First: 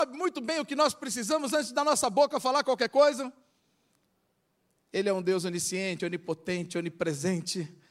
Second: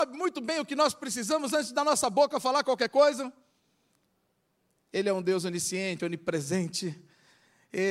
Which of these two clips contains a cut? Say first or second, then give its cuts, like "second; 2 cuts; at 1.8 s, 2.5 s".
second; 1 cut; at 6.0 s